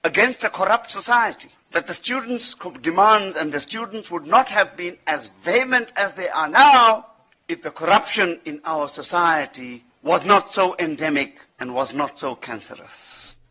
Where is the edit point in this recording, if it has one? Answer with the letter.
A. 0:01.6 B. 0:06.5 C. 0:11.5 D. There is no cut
C